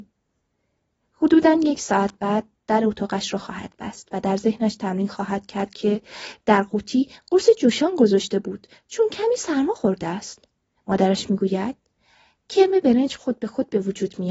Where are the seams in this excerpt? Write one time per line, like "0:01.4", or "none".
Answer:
0:01.0
0:10.8

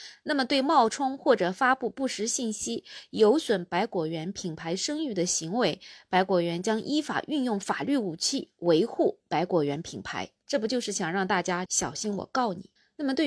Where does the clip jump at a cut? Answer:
0:10.4
0:11.6

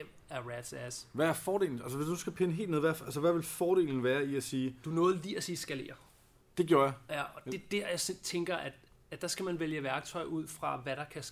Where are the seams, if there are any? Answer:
none

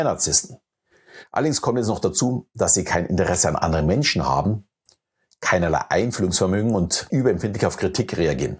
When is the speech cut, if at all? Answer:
0:07.1

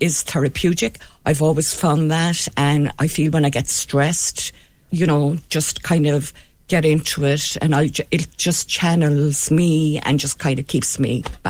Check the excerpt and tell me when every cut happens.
0:04.9

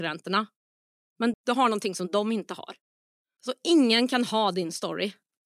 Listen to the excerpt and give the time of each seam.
0:01.3
0:03.4

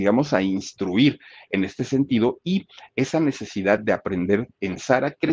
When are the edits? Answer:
none

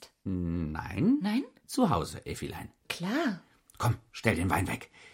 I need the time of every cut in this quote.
0:02.8

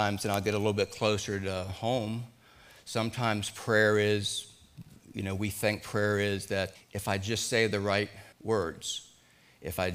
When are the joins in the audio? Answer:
0:06.8
0:08.3

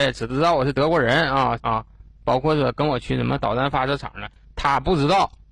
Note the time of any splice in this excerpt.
0:01.6
0:04.5

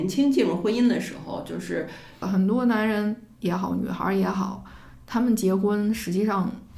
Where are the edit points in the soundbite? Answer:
0:02.2

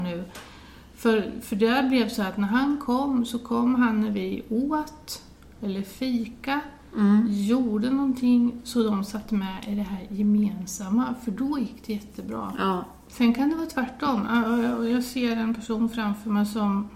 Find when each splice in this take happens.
0:13.1

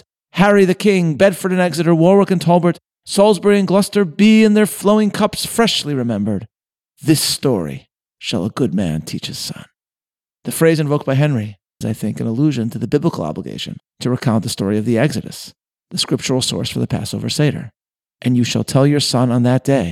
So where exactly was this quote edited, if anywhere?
0:11.8

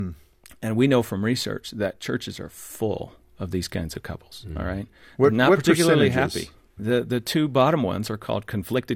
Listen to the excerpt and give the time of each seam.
0:06.8

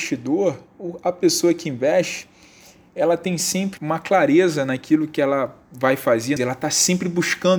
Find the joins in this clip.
0:03.8
0:06.4

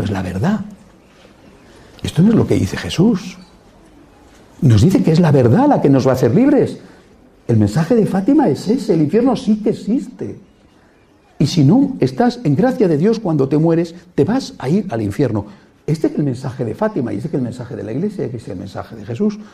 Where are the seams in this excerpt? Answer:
none

